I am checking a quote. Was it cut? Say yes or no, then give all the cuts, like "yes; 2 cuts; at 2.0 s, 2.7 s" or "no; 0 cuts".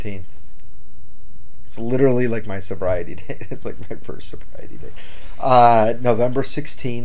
no; 0 cuts